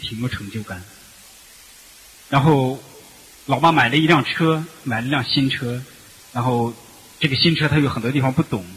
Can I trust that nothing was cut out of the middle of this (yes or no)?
yes